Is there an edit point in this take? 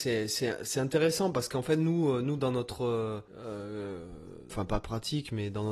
yes; 2 cuts; at 3.3 s, 4.5 s

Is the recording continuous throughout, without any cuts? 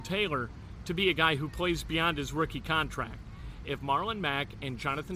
no; 1 cut; at 3.6 s

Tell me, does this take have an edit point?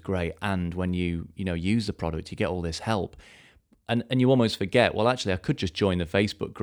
no; 0 cuts

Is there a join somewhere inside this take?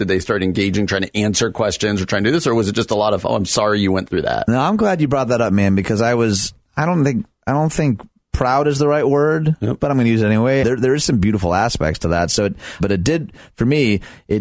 yes; 2 cuts; at 10.6 s, 12.8 s

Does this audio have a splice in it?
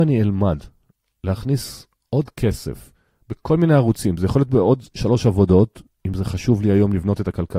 no; 0 cuts

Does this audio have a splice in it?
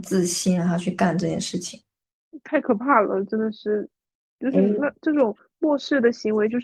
no; 0 cuts

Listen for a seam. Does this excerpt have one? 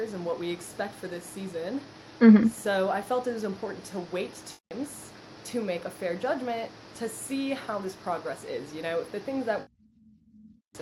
no; 0 cuts

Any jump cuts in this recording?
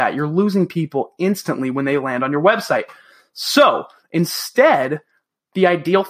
no; 0 cuts

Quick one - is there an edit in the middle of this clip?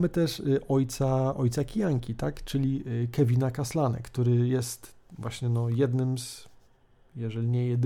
no; 0 cuts

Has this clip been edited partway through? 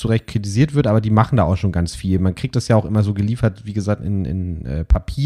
no; 0 cuts

